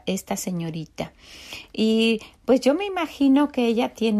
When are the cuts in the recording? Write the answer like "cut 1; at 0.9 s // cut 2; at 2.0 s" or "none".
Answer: none